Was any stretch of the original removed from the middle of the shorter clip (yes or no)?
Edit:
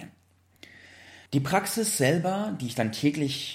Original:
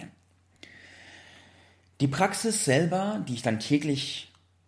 yes